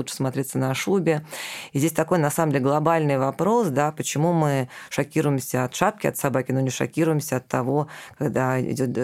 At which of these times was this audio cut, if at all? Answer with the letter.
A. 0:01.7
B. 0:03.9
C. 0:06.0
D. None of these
D